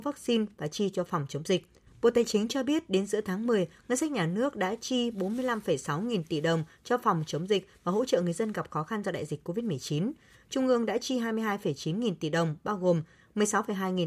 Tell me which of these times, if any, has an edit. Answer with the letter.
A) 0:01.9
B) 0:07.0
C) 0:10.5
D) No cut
A